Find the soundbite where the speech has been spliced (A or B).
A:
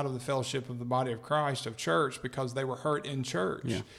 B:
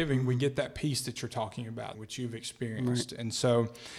B